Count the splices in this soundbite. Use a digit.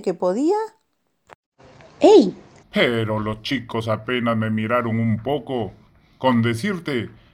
1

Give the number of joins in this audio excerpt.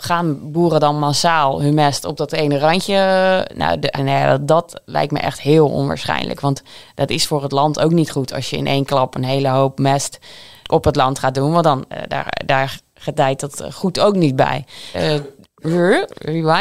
2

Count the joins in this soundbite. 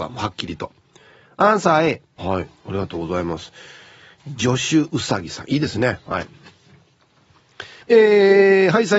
2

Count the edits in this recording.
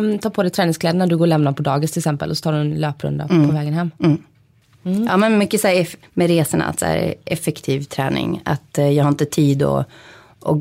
1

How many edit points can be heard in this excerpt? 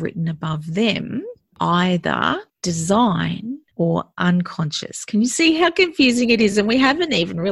0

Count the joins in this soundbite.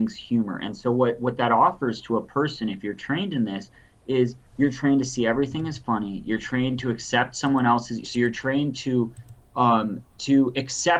2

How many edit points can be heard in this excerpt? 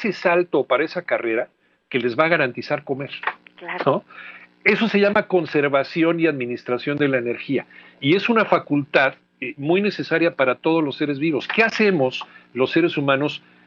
0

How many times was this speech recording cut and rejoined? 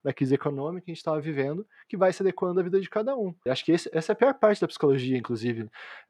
1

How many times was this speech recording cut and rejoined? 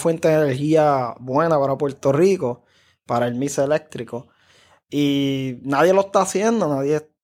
0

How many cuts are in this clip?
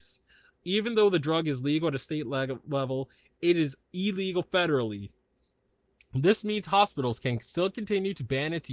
0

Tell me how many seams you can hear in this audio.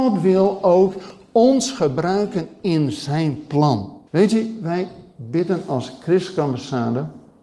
1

